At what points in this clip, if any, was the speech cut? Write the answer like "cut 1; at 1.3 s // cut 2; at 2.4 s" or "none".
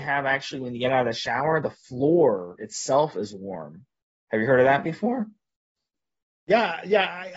none